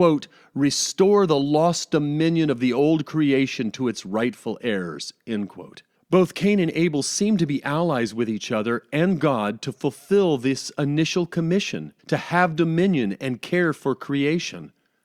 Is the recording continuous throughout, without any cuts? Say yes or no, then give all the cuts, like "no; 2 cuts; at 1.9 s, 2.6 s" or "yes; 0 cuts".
no; 2 cuts; at 6.0 s, 12.0 s